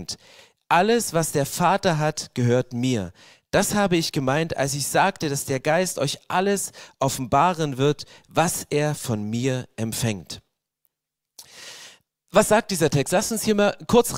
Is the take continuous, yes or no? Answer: yes